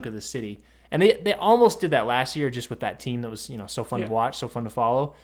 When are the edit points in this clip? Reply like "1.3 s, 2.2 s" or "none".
none